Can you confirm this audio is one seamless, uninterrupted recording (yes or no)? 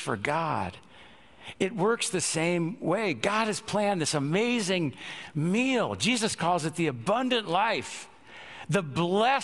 yes